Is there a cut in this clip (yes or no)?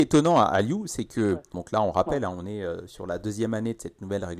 yes